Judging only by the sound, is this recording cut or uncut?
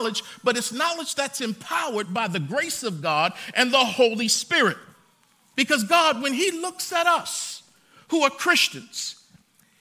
uncut